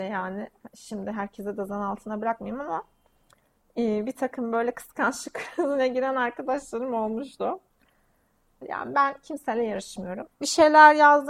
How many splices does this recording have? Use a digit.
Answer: 2